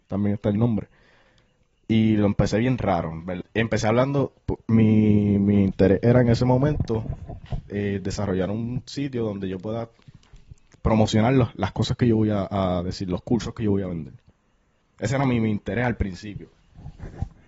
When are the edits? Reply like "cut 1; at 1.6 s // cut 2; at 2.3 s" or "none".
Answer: cut 1; at 3.4 s